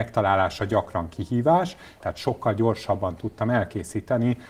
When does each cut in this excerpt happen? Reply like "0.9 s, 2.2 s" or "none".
2.0 s